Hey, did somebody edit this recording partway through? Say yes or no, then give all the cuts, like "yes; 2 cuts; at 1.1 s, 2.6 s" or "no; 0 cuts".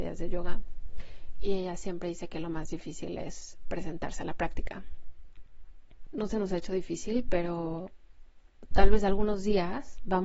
yes; 1 cut; at 6.1 s